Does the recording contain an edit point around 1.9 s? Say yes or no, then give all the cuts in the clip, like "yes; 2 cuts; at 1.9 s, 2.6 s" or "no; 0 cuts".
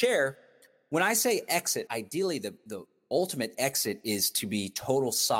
yes; 1 cut; at 1.9 s